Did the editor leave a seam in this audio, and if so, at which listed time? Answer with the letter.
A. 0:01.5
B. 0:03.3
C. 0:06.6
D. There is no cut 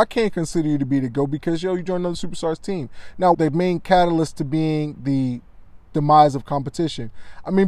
B